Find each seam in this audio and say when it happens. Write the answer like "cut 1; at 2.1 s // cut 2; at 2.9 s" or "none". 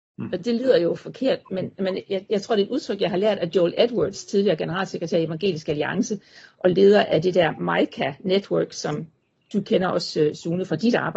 none